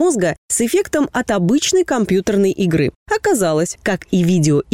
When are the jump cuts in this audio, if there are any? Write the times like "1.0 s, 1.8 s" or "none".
3.8 s